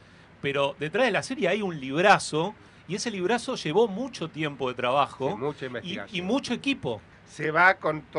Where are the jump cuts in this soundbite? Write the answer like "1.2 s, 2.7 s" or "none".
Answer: 7.1 s